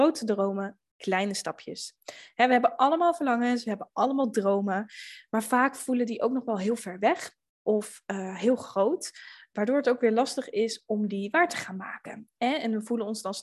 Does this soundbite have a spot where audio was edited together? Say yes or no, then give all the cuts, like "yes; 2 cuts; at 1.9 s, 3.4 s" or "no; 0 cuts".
no; 0 cuts